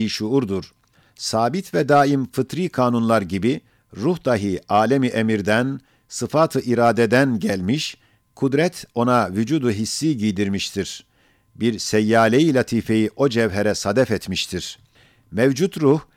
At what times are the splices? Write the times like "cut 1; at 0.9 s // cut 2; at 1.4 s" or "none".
none